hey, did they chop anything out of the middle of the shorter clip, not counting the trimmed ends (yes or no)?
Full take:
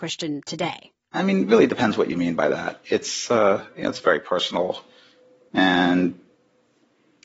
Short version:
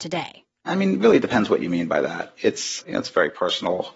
yes